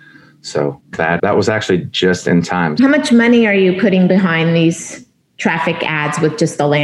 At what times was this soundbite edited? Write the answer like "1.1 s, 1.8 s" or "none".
1.2 s, 2.8 s